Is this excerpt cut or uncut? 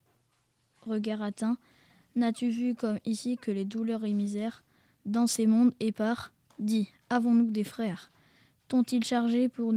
uncut